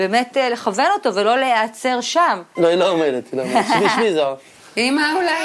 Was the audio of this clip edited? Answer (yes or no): yes